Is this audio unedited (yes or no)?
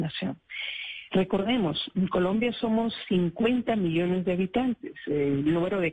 yes